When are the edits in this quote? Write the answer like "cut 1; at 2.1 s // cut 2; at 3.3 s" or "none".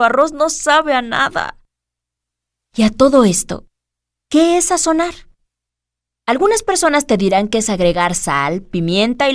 none